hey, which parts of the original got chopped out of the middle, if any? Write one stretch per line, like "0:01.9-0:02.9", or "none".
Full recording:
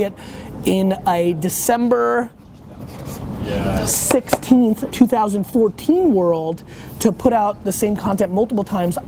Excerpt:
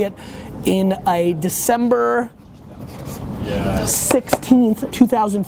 none